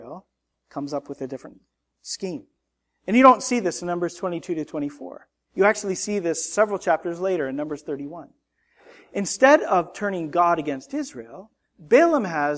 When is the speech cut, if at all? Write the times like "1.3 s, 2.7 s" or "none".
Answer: none

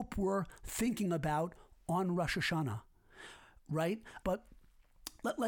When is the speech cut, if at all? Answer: 4.2 s

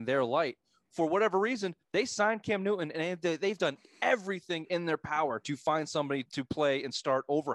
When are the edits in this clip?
1.8 s, 6.3 s

